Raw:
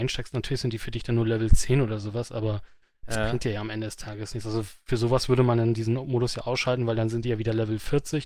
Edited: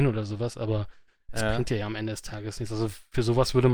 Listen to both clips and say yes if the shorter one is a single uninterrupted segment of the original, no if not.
yes